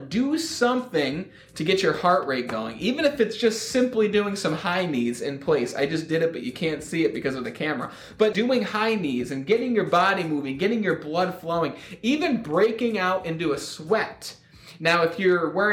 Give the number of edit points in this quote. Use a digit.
1